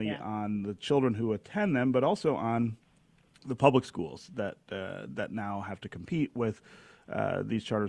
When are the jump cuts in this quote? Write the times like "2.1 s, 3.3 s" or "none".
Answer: none